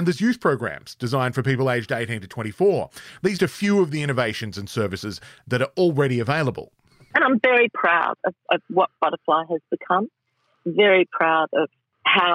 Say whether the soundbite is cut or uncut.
cut